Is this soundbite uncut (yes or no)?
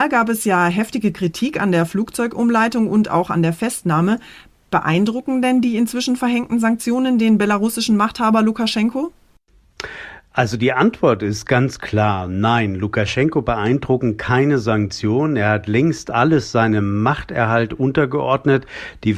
yes